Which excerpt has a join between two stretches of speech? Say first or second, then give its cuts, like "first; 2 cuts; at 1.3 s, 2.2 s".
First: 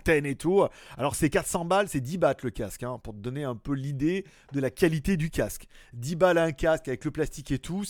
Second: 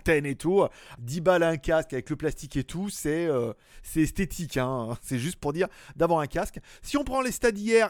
second; 1 cut; at 1.0 s